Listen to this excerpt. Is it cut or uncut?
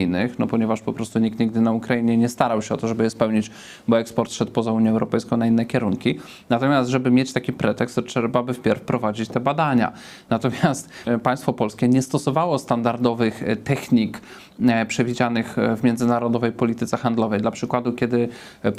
cut